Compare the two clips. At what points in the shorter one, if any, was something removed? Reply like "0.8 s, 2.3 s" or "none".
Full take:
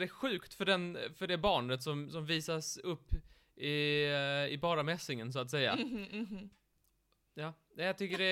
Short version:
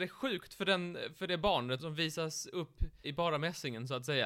1.8 s, 3.0 s